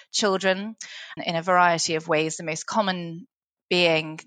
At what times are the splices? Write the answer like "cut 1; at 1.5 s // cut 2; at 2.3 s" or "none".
cut 1; at 1.2 s

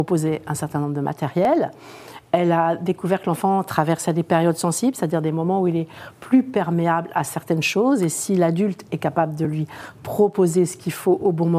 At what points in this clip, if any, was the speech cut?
none

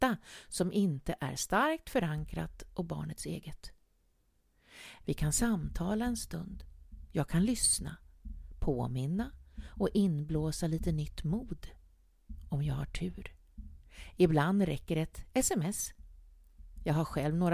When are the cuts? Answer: cut 1; at 5.0 s

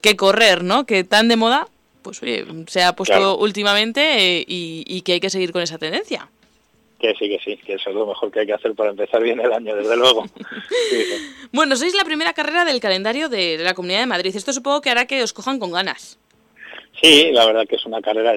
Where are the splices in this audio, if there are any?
none

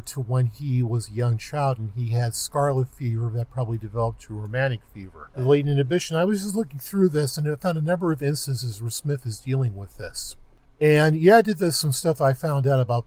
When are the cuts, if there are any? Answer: cut 1; at 5.3 s

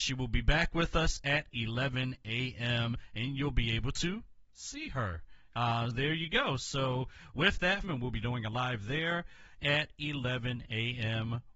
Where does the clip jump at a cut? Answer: cut 1; at 5.9 s // cut 2; at 7.8 s

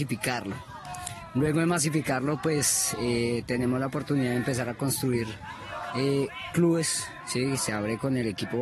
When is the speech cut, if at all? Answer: none

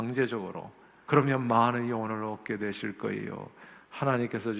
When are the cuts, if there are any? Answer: cut 1; at 1.0 s

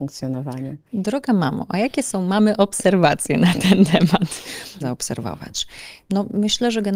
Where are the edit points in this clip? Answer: cut 1; at 4.8 s

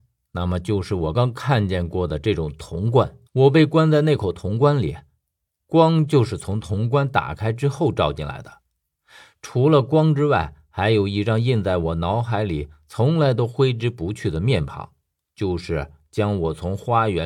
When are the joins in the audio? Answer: cut 1; at 1.1 s // cut 2; at 3.3 s

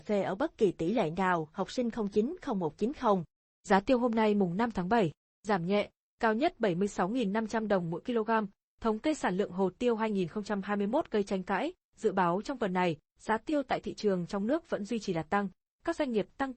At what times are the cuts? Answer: none

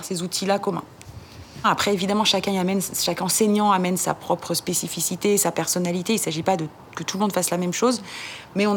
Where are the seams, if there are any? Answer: cut 1; at 1.6 s

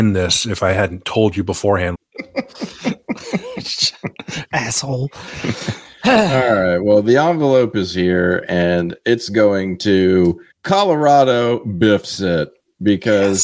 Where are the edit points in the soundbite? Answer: cut 1; at 1.9 s // cut 2; at 10.5 s

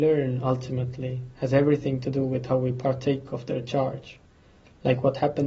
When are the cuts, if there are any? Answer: none

